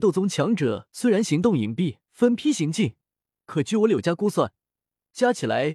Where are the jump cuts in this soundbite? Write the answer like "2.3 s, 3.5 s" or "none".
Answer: 2.0 s